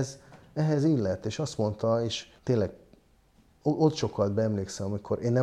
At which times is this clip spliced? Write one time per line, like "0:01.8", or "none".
0:02.4